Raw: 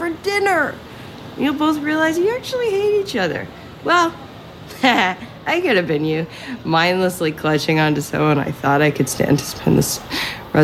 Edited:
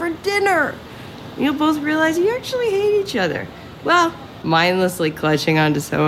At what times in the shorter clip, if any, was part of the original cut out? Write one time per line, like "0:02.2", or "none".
0:04.4